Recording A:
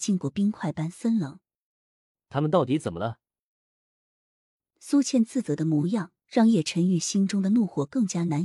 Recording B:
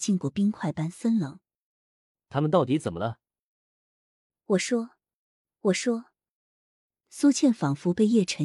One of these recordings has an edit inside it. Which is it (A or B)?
A